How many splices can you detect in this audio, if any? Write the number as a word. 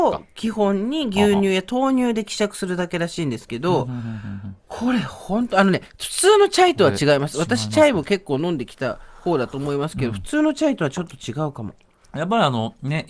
one